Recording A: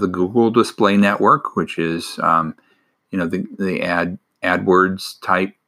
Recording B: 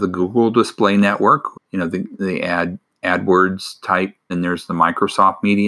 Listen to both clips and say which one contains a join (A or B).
B